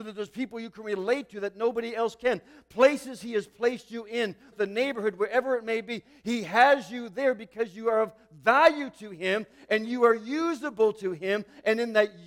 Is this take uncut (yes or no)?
no